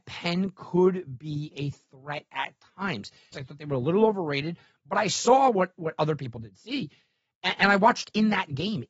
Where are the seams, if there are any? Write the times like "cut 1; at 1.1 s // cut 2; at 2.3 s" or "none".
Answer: cut 1; at 3.3 s